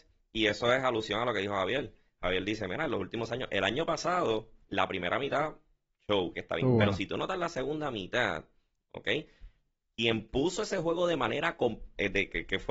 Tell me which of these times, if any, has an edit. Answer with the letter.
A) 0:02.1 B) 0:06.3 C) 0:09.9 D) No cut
B